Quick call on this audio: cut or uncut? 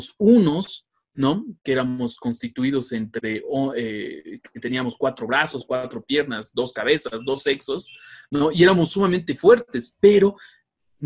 uncut